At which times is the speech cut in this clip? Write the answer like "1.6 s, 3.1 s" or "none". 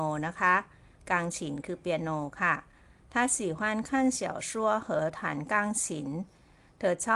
none